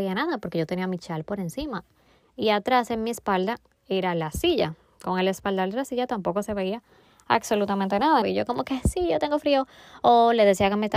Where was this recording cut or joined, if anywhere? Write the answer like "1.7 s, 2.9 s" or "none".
8.2 s